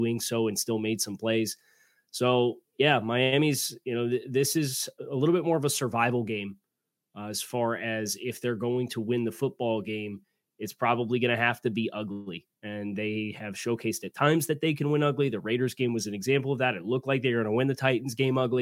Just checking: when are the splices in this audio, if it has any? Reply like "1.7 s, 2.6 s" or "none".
none